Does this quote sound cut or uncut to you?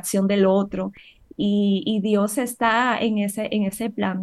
uncut